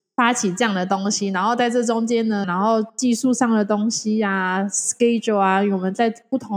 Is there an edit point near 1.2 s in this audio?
no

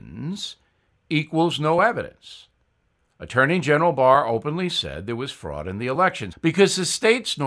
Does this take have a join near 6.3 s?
yes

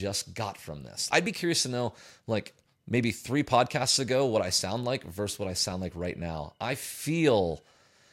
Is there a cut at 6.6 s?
no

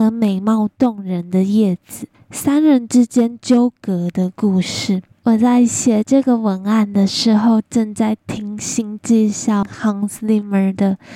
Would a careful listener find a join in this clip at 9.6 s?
yes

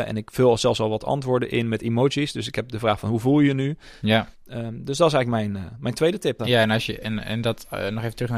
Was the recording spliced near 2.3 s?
no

